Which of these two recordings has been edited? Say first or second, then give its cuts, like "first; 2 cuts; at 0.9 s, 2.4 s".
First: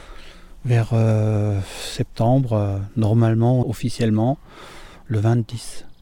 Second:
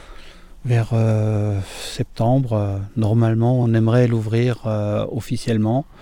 first; 2 cuts; at 3.6 s, 5.1 s